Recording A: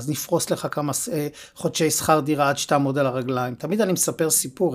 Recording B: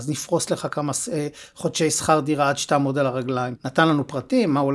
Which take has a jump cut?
B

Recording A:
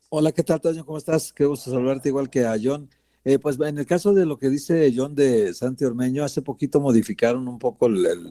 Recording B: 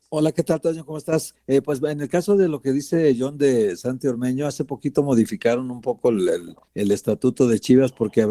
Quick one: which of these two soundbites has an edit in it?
B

